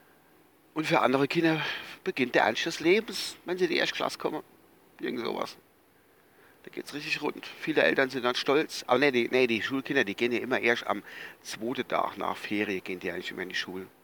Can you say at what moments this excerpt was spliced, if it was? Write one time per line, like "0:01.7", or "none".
none